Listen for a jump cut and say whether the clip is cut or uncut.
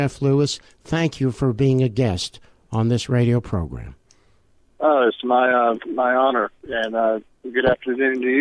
uncut